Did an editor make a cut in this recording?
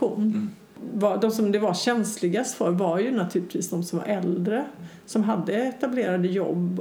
no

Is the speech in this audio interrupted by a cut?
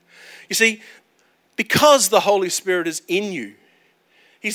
no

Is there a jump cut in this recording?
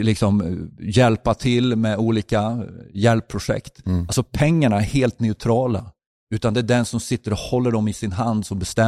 no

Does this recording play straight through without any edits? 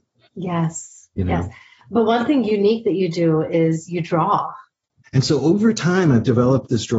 no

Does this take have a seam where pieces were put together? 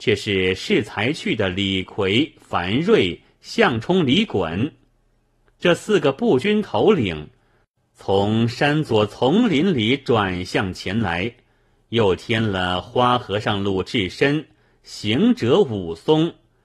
no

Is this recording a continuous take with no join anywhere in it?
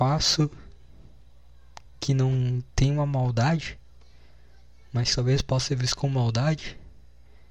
yes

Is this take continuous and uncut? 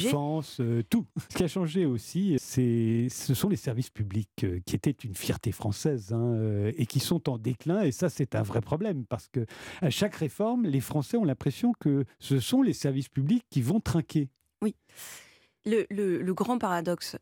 no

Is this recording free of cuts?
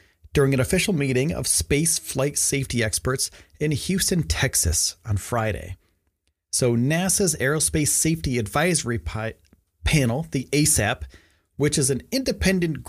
yes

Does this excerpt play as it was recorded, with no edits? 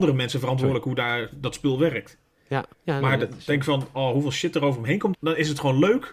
no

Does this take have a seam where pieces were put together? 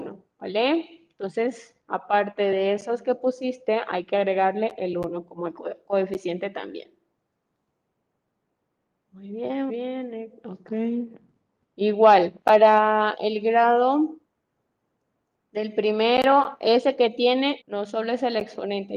yes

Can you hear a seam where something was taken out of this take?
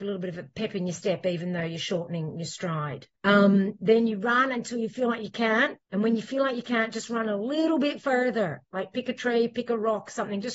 yes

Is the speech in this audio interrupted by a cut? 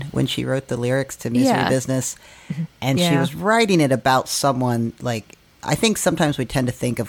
no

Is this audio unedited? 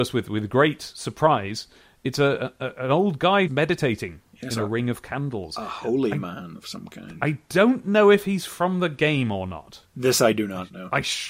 no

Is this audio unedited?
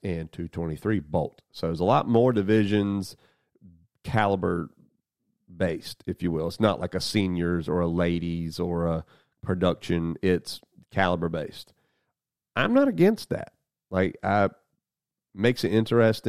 yes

